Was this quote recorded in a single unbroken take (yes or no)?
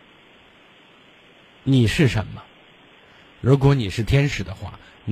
yes